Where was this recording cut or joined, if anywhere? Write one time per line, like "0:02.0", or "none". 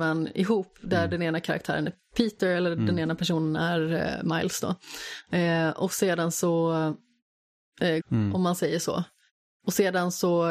0:08.0